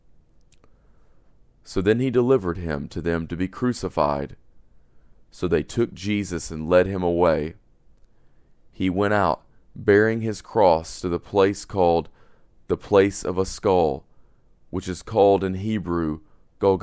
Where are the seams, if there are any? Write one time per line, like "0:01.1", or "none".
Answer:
none